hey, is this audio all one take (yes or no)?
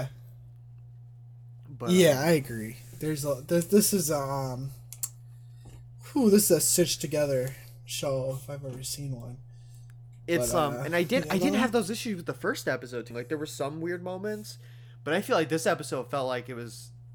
no